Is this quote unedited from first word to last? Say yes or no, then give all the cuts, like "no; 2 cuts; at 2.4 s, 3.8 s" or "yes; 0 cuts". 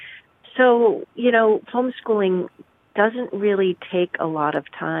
no; 1 cut; at 1.7 s